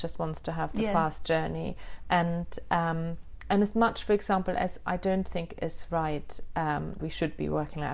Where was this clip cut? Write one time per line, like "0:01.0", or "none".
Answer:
0:07.0

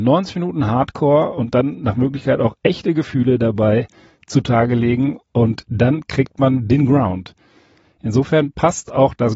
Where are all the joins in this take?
none

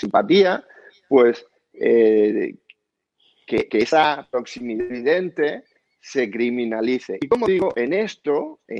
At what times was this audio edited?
none

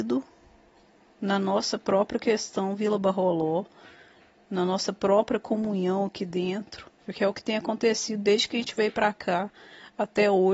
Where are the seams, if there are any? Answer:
0:07.0

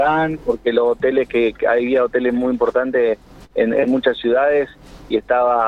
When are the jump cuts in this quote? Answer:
none

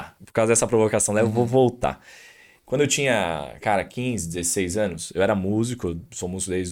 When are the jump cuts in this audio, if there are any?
none

